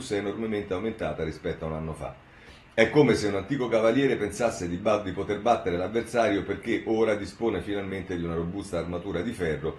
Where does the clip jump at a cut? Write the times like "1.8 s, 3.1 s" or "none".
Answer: none

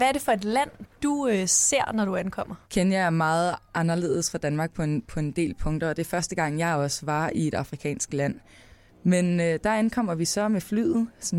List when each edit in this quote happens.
2.6 s, 8.9 s

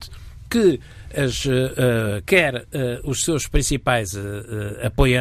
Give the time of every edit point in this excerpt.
2.2 s

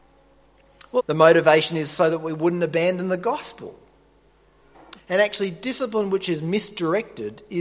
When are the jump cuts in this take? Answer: 1.0 s, 5.0 s

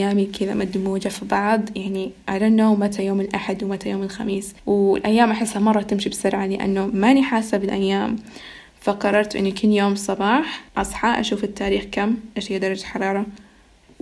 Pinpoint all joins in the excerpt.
4.6 s, 10.7 s

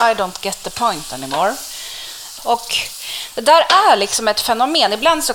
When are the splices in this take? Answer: 2.4 s

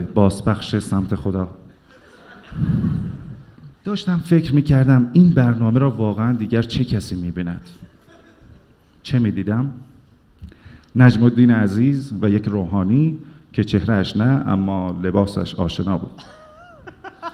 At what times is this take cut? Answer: 3.7 s

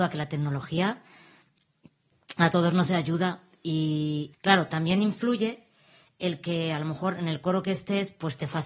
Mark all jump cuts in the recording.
4.3 s

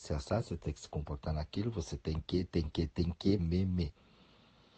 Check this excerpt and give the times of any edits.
3.4 s

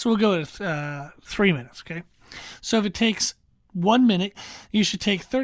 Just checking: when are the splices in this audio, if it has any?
2.6 s, 4.3 s

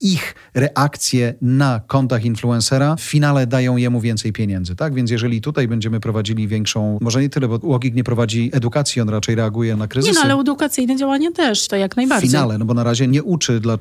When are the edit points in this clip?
11.7 s

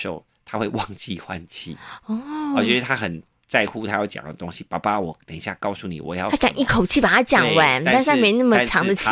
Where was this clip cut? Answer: none

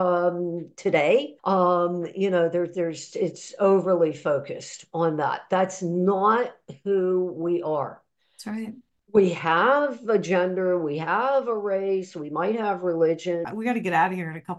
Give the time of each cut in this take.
1.4 s, 13.4 s

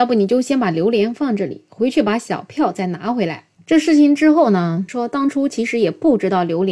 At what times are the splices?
3.5 s, 4.9 s

